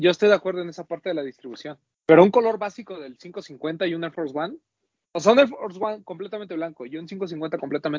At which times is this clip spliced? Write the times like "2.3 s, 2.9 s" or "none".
1.9 s

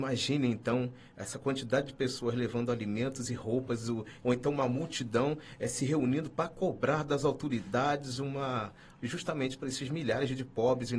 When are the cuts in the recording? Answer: 4.2 s, 9.0 s

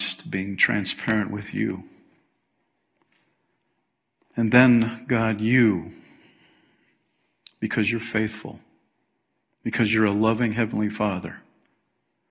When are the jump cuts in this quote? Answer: none

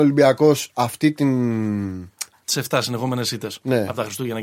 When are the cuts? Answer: 2.4 s

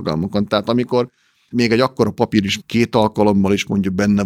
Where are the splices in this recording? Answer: 1.5 s, 2.6 s

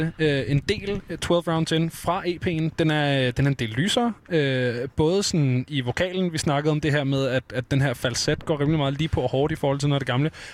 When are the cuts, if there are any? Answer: none

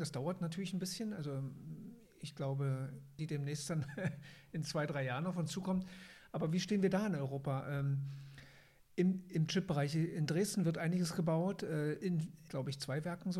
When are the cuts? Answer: 3.2 s, 12.5 s

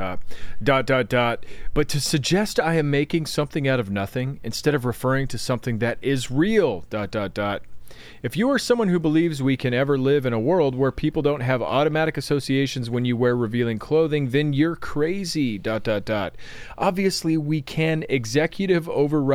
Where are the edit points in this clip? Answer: none

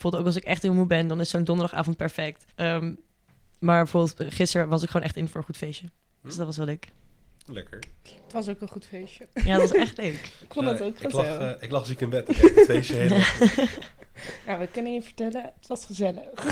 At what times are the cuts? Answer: 2.5 s

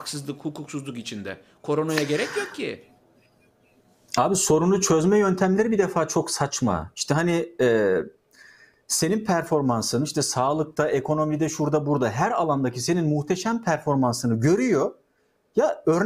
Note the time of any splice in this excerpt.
none

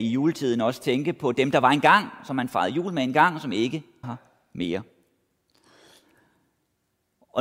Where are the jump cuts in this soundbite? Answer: 4.0 s

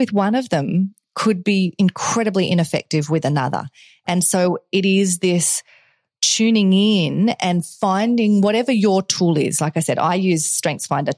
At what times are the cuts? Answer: none

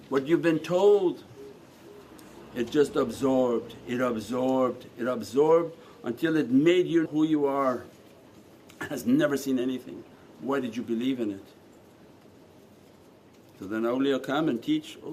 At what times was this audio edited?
7.1 s

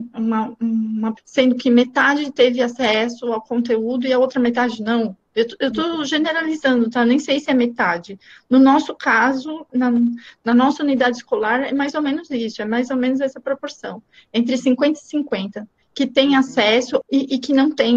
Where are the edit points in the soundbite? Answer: 1.2 s, 9.7 s, 17.0 s

